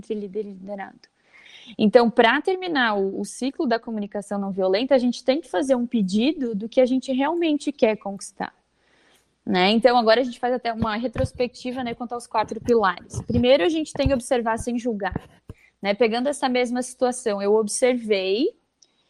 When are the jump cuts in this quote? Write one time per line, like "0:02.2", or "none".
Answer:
none